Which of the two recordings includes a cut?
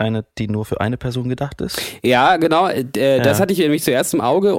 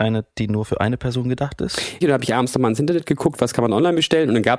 second; 1 cut; at 2.0 s

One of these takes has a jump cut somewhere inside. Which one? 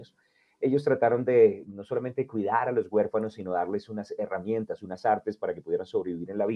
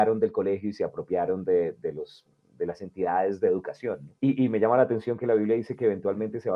second; 1 cut; at 4.2 s

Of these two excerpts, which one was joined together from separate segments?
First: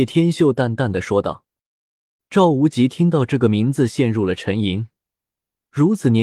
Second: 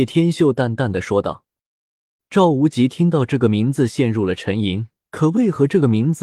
second; 1 cut; at 5.1 s

